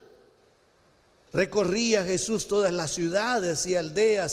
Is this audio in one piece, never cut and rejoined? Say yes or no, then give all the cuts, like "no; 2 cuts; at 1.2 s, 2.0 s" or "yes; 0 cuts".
no; 1 cut; at 1.3 s